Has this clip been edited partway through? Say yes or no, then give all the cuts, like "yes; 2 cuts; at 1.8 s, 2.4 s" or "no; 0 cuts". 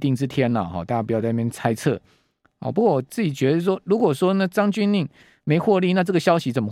no; 0 cuts